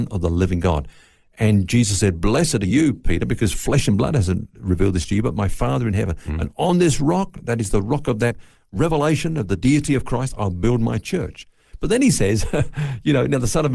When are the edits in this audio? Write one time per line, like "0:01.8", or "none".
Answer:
none